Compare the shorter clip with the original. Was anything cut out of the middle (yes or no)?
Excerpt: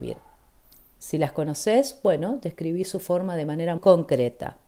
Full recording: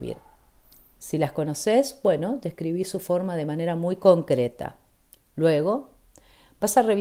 yes